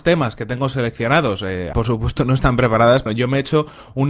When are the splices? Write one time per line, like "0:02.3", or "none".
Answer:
0:01.7
0:03.1